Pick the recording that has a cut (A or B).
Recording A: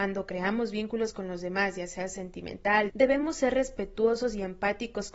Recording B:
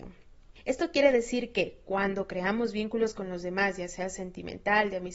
A